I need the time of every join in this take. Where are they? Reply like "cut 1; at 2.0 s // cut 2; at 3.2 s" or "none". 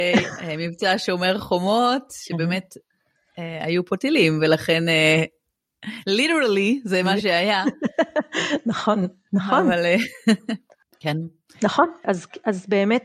cut 1; at 12.0 s